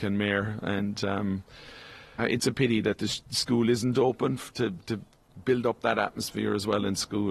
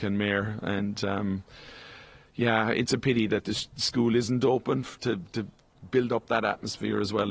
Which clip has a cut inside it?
first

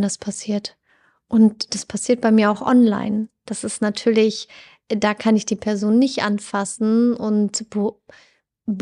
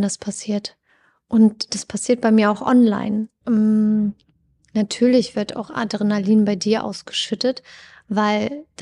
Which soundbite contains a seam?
second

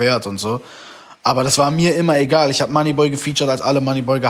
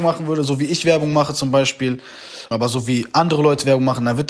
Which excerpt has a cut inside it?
second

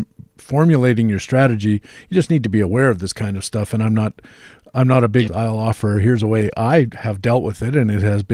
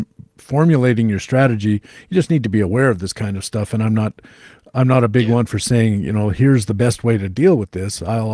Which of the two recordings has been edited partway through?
first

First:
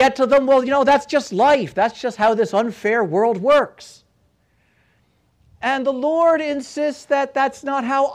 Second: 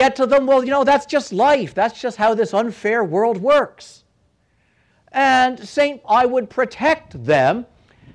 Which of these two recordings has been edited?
second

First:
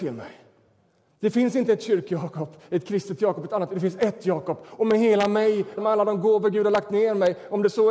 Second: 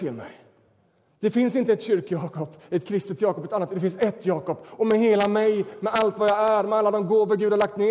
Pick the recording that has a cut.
first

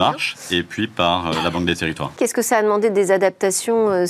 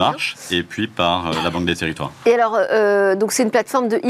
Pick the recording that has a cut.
first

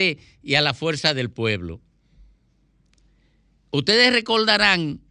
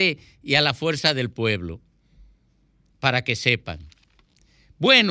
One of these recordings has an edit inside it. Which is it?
second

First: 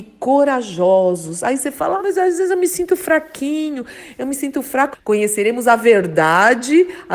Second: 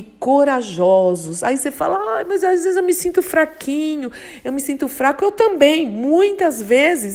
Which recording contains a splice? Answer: first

